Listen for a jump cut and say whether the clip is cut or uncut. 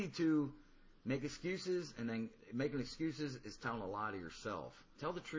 uncut